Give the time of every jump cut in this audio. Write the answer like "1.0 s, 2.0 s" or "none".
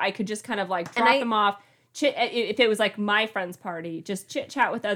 none